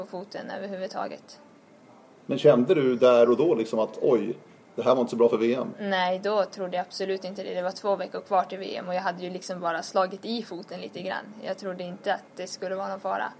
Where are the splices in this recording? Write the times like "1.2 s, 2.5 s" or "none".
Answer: none